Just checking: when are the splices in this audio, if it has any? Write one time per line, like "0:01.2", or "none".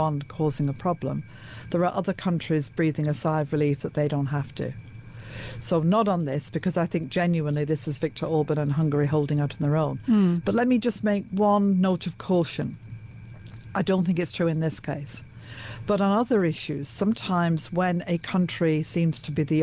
0:10.4